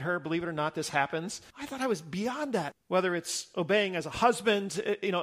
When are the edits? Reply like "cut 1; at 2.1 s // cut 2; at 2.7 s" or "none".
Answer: cut 1; at 1.5 s // cut 2; at 2.7 s